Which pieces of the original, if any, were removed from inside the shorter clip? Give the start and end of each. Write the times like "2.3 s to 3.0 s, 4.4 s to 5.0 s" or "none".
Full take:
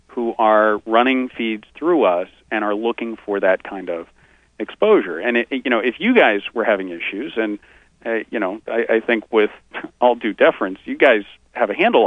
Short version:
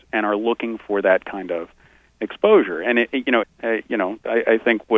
5.8 s to 7.9 s

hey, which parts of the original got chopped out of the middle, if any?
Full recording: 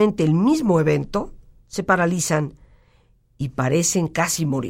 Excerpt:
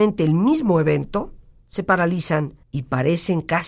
2.6 s to 3.3 s

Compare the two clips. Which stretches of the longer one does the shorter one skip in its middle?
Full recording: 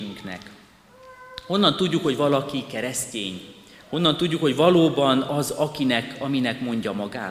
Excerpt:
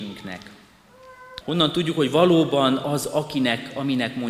1.4 s to 3.9 s

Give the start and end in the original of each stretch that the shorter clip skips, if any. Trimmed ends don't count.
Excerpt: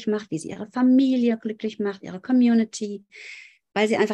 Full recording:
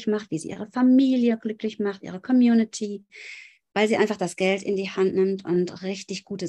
none

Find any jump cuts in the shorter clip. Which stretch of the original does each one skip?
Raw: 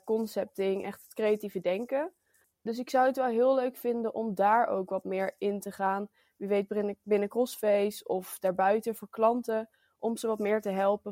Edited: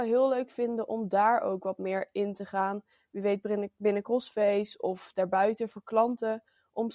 none

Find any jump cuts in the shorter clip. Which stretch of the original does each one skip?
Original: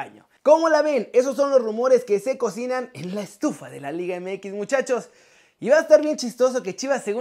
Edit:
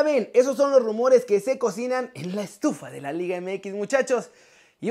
none

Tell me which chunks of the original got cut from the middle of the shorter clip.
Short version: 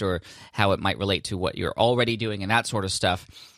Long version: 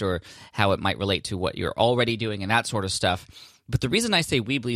none

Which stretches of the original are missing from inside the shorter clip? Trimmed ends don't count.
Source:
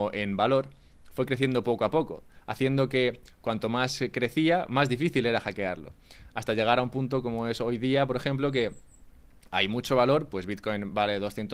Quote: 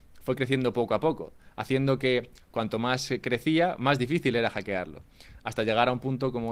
none

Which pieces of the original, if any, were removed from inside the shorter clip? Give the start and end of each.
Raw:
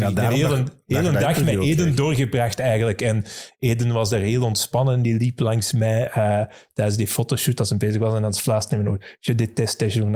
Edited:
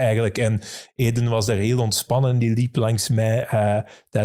none

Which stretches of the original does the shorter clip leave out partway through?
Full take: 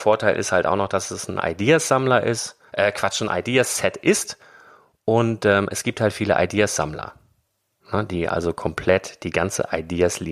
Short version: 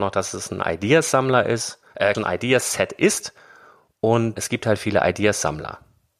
2.9 s to 3.2 s, 5.4 s to 5.7 s

